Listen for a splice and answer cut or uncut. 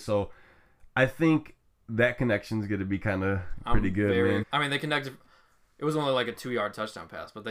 cut